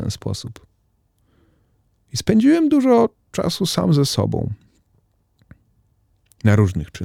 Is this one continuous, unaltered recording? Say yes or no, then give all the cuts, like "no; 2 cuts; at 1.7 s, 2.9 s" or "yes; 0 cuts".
yes; 0 cuts